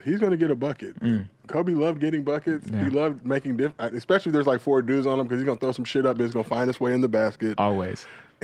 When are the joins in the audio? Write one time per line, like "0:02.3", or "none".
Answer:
none